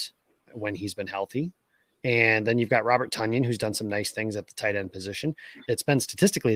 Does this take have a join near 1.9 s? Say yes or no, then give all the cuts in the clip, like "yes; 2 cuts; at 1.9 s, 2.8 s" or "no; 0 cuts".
no; 1 cut; at 5.6 s